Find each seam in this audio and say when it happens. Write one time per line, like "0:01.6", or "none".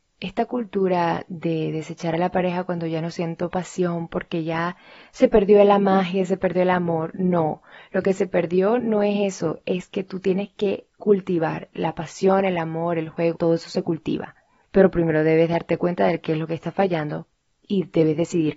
0:08.8
0:13.4